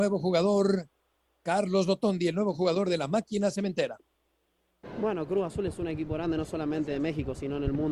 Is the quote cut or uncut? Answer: uncut